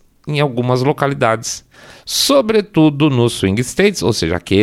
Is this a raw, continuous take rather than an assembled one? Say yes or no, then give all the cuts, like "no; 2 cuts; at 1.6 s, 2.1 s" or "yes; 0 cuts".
yes; 0 cuts